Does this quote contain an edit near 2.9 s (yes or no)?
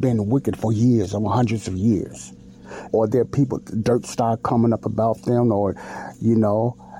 yes